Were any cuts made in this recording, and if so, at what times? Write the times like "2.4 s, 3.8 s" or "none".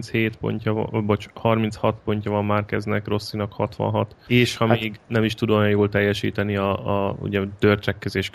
4.3 s